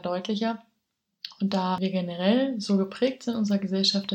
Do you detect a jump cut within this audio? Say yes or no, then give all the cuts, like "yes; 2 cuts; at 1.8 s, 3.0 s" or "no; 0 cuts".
no; 0 cuts